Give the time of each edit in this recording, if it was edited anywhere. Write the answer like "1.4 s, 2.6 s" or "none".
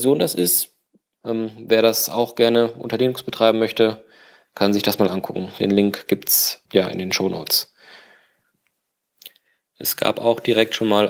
1.2 s, 6.7 s